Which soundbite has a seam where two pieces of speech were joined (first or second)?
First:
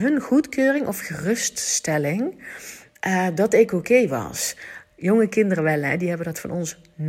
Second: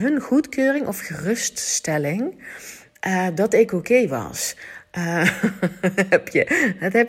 first